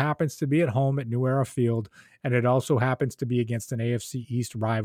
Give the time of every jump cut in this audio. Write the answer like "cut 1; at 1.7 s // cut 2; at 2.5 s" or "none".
none